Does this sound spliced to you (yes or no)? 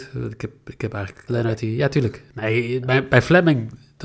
yes